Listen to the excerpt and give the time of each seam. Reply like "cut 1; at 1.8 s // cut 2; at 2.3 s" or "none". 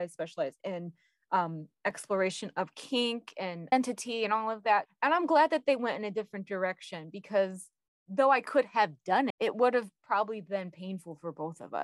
cut 1; at 4.9 s // cut 2; at 9.3 s